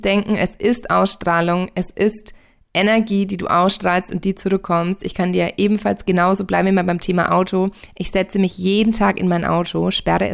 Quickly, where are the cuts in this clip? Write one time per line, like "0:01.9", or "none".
none